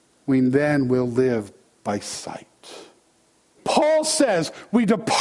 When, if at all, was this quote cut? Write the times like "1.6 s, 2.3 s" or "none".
3.6 s